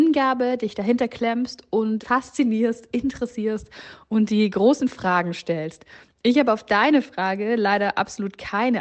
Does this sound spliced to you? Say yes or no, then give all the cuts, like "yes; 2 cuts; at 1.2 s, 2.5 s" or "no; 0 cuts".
yes; 1 cut; at 2.0 s